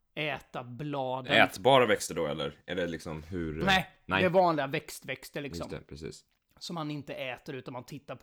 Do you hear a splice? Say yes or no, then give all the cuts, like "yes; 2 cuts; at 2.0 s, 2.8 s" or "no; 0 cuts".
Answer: no; 0 cuts